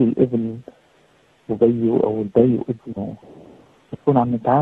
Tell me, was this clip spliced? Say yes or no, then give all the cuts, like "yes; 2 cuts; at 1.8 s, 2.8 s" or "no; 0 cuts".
no; 0 cuts